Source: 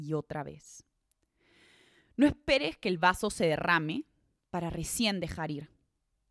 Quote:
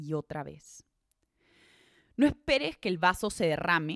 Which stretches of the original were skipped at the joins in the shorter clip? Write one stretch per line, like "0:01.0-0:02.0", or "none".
none